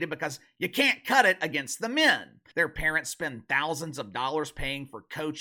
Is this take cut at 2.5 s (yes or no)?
yes